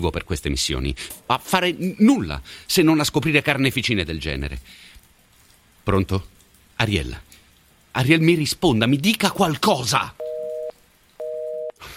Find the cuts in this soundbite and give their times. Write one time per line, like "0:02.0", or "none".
0:01.1